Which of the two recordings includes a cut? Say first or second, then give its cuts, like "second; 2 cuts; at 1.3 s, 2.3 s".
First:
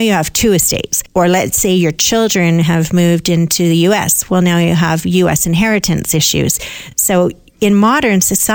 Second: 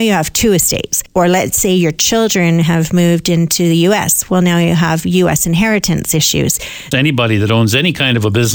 second; 1 cut; at 6.9 s